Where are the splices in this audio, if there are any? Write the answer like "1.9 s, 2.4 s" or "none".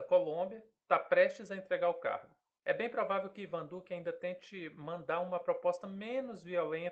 2.6 s

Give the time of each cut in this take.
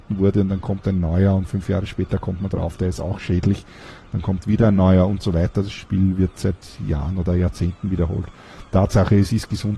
none

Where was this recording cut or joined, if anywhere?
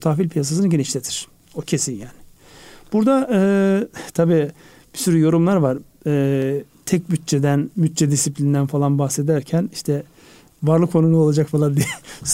none

